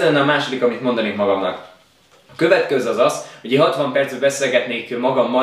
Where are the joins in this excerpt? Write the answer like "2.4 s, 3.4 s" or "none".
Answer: none